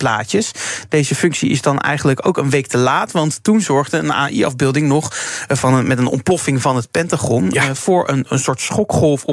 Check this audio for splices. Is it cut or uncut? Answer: uncut